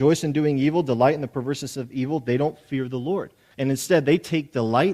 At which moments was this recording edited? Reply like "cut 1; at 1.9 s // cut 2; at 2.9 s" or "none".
cut 1; at 3.5 s